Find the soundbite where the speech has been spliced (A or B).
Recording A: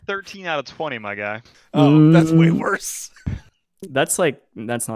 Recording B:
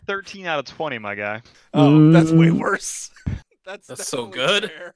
B